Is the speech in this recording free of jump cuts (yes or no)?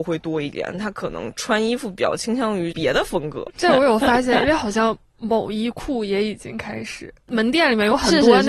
no